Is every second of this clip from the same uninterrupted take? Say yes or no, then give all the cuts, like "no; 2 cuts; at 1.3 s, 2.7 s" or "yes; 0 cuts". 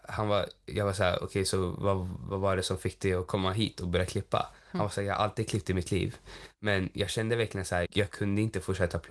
no; 1 cut; at 7.8 s